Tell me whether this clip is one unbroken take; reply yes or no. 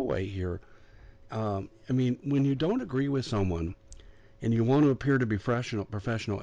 yes